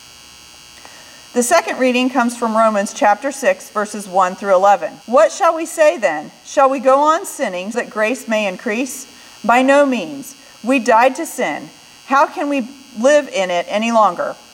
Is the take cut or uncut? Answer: cut